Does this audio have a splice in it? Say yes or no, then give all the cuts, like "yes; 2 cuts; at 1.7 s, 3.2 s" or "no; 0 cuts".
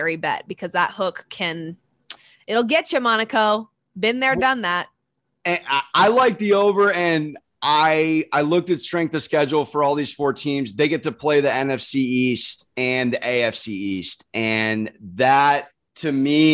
no; 0 cuts